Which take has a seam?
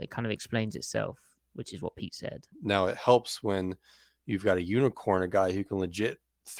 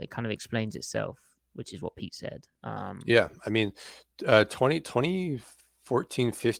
first; 1 cut; at 2.5 s

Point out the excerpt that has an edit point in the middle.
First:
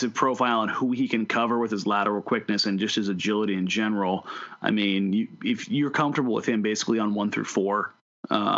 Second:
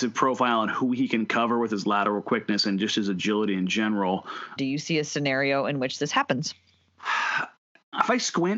second; 1 cut; at 4.6 s

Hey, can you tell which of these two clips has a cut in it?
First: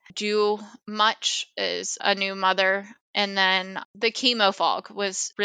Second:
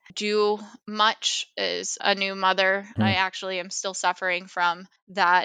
second; 1 cut; at 3.0 s

